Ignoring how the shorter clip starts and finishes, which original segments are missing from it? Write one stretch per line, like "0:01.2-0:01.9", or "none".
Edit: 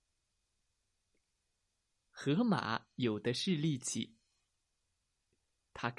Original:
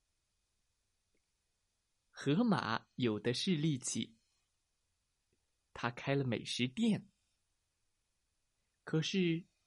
none